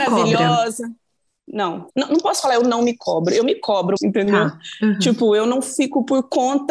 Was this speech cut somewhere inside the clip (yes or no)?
yes